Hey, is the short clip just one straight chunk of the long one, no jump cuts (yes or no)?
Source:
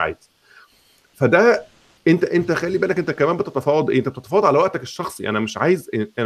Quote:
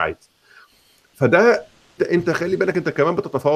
no